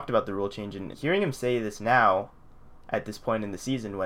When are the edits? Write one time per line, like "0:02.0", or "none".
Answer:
0:00.9